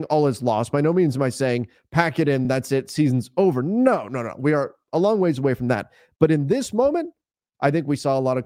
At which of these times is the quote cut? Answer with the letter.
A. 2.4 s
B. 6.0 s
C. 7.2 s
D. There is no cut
D